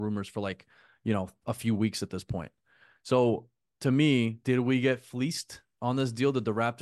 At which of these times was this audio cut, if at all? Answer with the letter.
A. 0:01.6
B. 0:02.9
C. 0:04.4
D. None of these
C